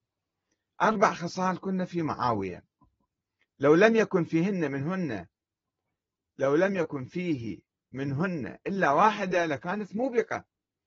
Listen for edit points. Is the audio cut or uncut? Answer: uncut